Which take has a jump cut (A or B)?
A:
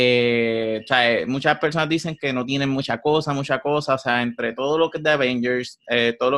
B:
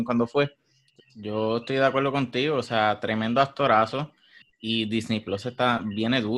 B